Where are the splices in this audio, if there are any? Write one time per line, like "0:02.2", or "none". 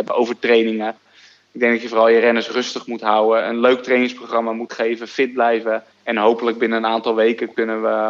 0:05.9